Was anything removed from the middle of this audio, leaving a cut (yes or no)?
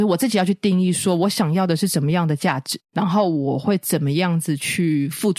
no